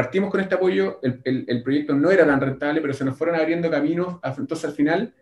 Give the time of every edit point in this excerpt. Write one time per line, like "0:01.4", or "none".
none